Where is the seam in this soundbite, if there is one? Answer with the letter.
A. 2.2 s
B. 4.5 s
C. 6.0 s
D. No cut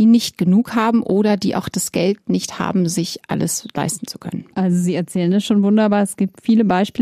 B